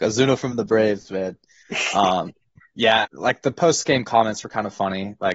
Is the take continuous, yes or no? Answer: no